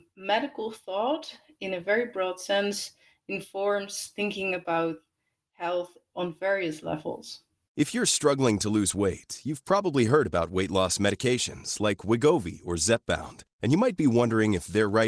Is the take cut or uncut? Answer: uncut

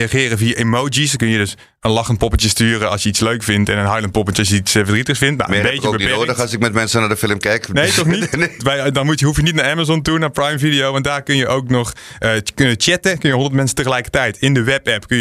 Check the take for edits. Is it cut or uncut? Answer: cut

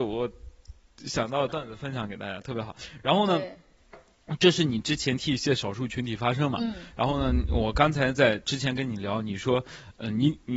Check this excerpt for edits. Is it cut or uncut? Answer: uncut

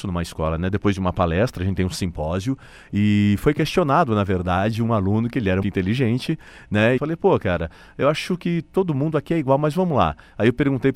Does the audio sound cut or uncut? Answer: cut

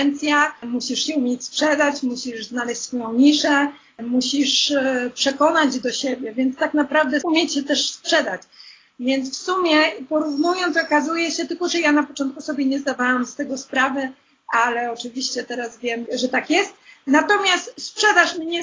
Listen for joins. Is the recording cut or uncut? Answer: uncut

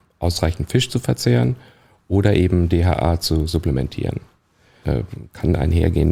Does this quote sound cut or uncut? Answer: cut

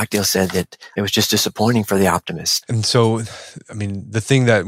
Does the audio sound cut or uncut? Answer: cut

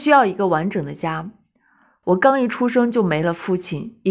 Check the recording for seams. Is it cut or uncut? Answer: cut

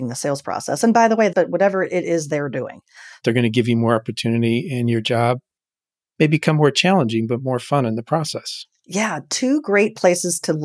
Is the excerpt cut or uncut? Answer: cut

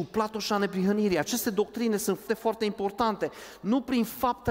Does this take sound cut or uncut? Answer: cut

